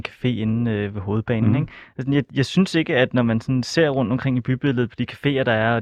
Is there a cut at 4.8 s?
no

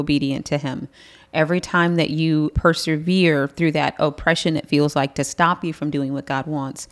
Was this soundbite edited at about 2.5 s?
yes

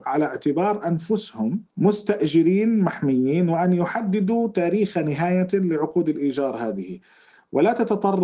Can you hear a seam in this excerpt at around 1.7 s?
yes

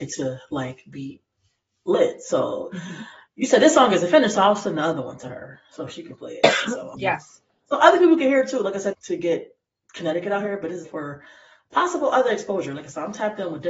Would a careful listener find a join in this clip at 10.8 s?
yes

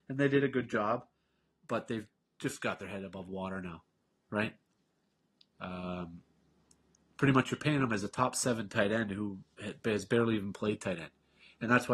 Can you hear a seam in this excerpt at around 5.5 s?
yes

